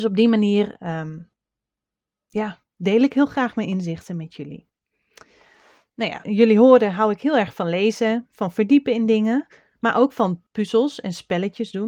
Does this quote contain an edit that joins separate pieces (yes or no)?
yes